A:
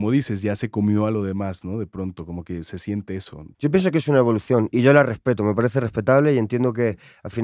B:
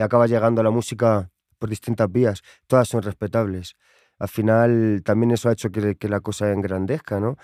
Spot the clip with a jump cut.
A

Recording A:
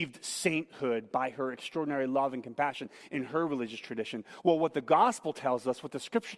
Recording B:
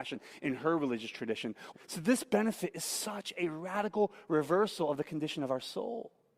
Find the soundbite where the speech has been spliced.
B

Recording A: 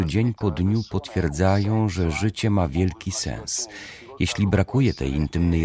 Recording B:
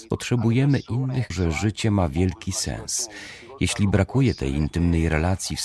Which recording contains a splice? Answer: B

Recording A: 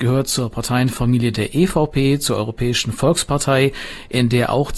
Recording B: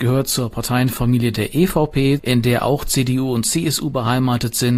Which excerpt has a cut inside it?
B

